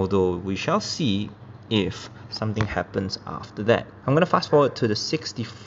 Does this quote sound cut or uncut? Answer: cut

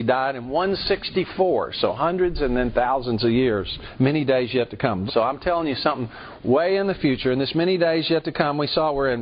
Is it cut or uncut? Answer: cut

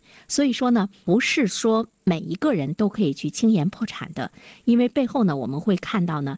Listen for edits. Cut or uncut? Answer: uncut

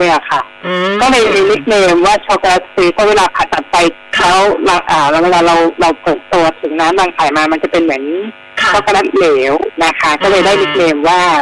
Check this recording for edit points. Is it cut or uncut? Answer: cut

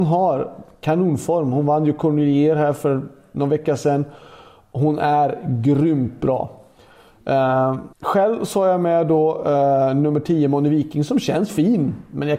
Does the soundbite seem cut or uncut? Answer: cut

